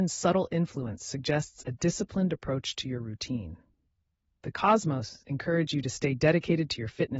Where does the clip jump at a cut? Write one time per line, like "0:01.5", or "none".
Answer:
none